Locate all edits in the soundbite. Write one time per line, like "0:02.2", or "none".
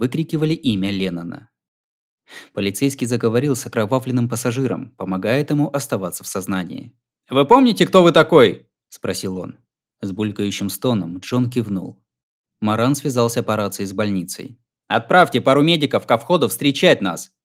none